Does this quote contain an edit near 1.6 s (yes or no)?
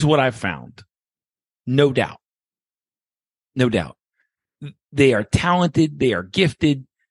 yes